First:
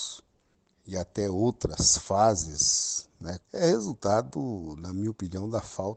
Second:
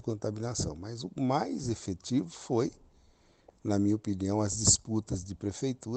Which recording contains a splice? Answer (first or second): first